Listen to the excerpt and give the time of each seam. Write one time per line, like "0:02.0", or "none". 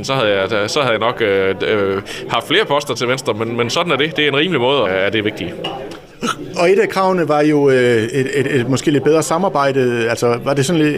0:04.9